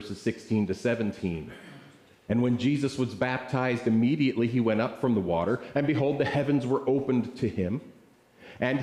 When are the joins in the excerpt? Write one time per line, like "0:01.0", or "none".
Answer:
none